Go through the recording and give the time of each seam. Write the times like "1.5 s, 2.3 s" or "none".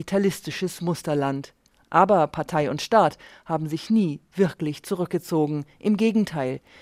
none

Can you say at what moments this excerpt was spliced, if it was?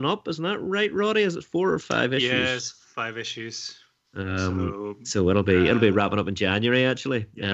none

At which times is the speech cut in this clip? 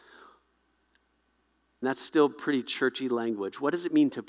1.8 s

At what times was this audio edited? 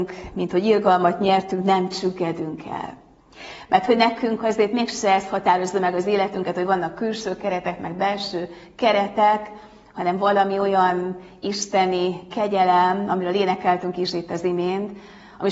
none

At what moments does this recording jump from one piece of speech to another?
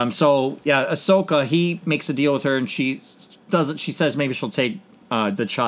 none

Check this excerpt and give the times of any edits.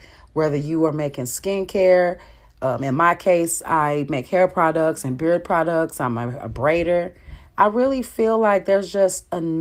none

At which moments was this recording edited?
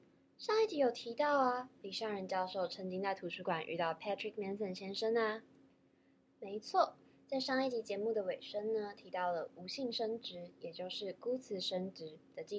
6.3 s

